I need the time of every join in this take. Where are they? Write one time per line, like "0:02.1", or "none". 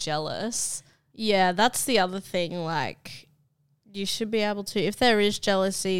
none